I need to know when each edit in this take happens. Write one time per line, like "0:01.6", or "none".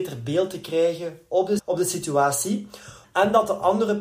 0:01.6
0:03.0